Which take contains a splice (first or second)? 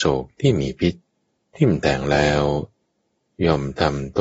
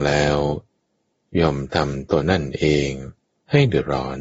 second